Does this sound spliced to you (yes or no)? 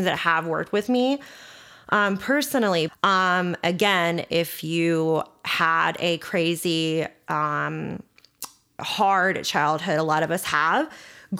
yes